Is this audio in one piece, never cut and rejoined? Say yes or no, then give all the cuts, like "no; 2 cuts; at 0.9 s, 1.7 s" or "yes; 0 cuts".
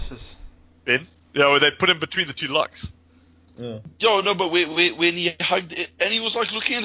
yes; 0 cuts